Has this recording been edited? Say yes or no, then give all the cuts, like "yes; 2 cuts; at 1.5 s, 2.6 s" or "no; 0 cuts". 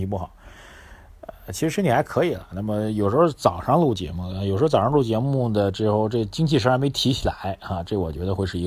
no; 0 cuts